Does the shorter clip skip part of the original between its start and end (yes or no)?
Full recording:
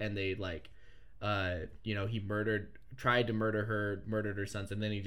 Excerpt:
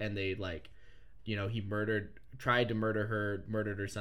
yes